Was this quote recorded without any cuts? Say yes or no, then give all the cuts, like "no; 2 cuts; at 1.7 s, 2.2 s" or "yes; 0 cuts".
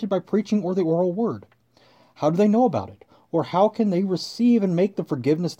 yes; 0 cuts